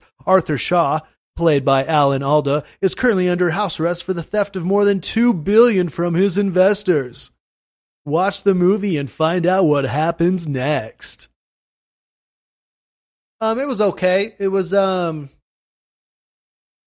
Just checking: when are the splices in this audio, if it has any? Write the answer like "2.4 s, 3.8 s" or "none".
none

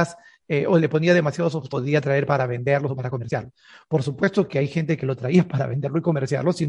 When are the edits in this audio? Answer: none

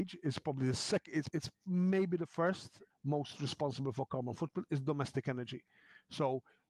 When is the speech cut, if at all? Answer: 1.3 s, 2.9 s

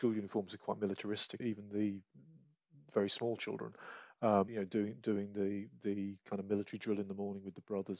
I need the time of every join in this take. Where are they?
1.4 s, 4.5 s

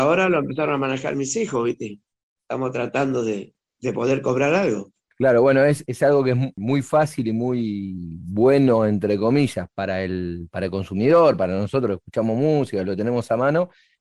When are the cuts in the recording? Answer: 5.1 s

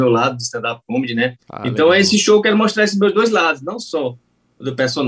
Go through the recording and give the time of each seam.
1.4 s

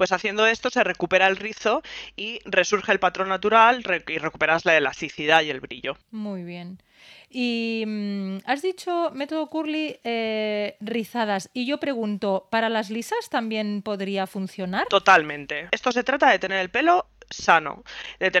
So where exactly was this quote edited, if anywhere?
6.0 s, 15.7 s

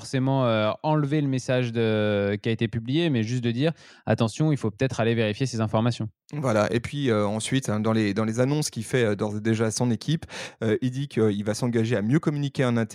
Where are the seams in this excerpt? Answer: none

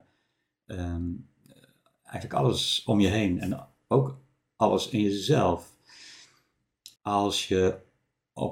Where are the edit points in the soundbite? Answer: 3.8 s, 7.0 s

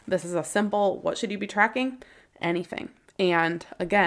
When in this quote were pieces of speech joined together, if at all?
none

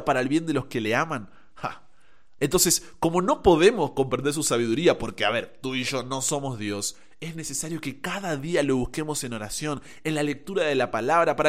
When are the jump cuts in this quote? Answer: 2.4 s

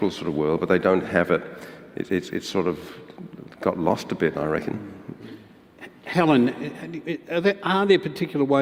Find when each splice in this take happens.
none

